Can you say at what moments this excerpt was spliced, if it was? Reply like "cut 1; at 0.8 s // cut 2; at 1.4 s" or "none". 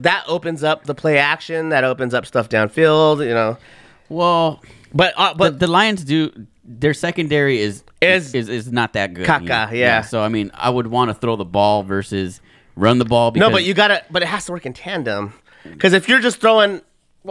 none